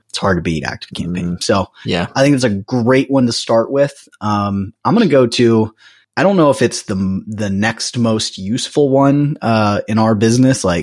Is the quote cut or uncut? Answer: uncut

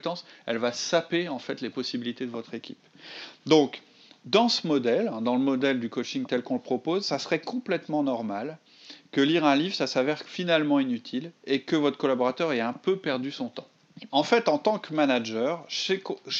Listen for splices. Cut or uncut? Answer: cut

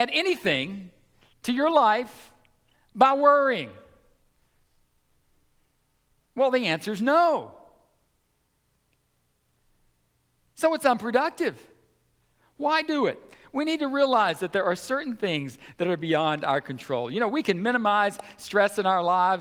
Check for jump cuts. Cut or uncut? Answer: uncut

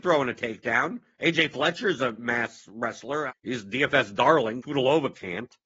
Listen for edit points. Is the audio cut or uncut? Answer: cut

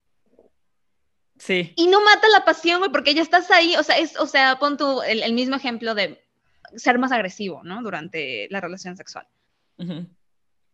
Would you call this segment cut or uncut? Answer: uncut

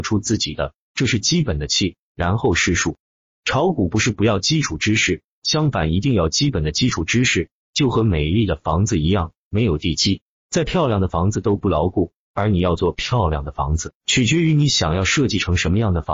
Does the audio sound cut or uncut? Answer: uncut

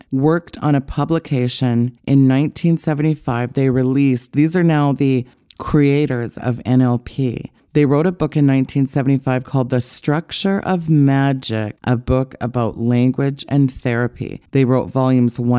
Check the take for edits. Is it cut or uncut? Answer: uncut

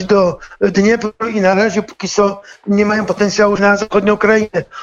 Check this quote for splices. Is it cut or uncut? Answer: cut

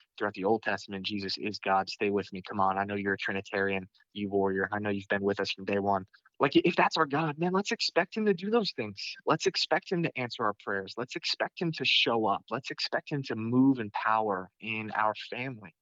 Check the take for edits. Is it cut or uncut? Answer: uncut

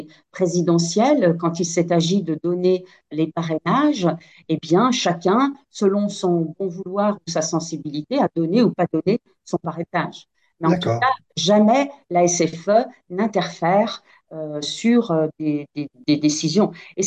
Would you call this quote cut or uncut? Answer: uncut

